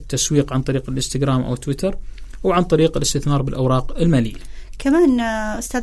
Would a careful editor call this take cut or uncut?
uncut